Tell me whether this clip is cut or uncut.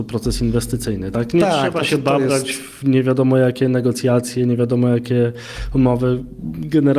uncut